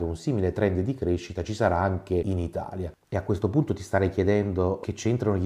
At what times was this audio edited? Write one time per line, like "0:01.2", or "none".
0:03.0